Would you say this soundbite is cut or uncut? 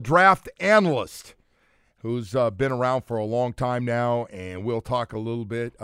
uncut